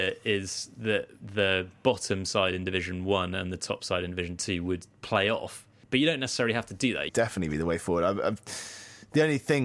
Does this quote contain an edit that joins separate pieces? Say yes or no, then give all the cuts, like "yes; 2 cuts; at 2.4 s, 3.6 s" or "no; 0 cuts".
yes; 1 cut; at 7.1 s